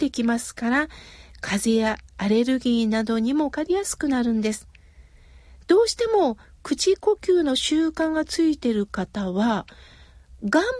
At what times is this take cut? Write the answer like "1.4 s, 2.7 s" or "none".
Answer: 3.5 s